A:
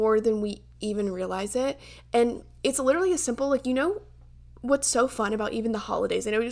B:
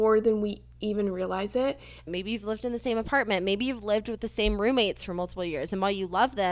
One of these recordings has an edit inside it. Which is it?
B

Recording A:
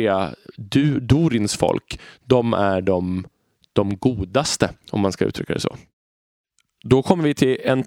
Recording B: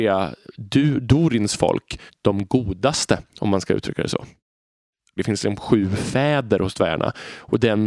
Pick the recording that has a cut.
B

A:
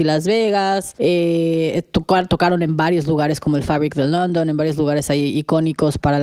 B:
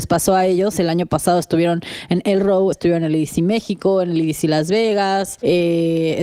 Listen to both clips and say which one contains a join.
B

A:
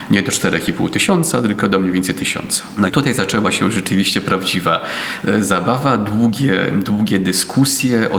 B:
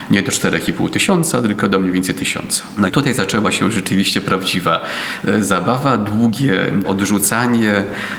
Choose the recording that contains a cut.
B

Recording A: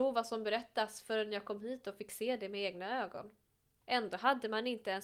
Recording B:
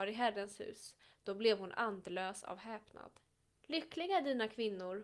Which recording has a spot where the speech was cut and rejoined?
B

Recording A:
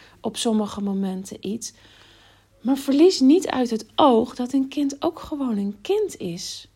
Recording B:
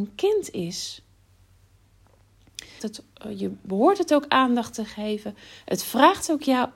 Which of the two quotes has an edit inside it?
B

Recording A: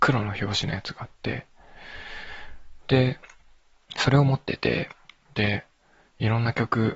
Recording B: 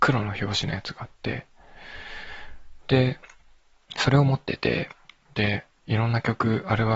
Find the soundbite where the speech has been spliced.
B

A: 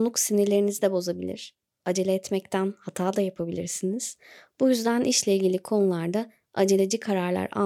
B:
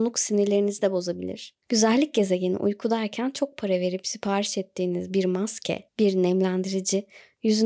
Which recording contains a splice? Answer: B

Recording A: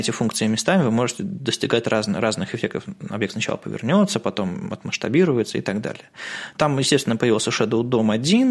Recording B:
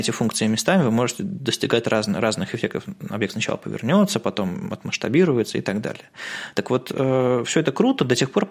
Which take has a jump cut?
A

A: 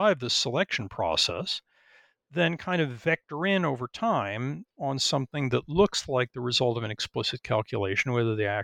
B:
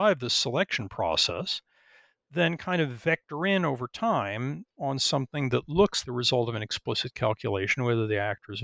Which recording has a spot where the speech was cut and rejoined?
B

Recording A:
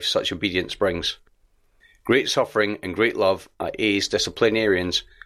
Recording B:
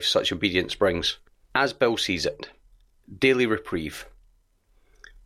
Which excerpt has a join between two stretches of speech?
B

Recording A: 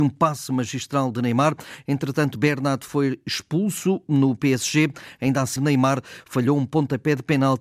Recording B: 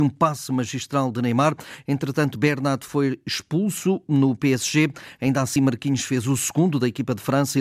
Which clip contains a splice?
A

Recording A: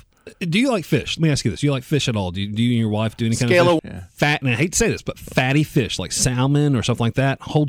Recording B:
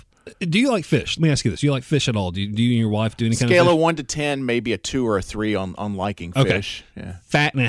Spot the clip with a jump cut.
A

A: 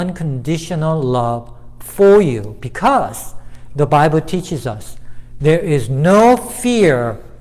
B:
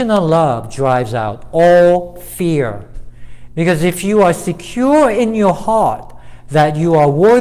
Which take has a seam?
B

